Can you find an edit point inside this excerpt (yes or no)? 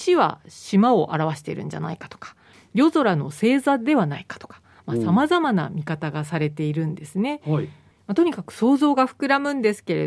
no